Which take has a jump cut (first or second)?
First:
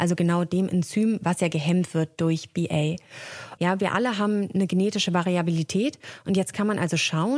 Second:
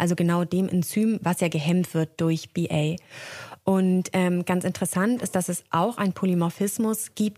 first